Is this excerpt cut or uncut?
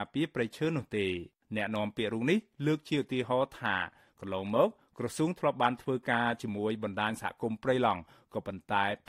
uncut